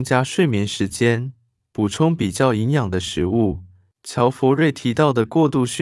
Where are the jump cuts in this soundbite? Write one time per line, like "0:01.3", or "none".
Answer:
0:03.9